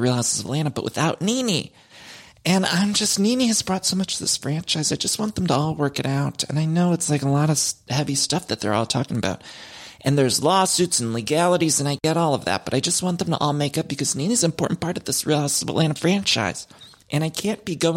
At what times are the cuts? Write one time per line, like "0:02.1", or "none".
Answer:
none